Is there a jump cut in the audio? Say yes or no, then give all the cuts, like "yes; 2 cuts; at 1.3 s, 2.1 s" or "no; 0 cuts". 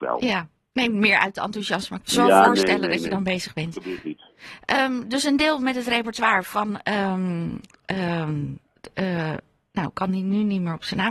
yes; 1 cut; at 2.0 s